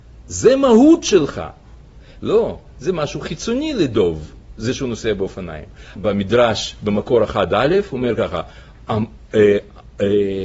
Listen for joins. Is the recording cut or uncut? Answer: cut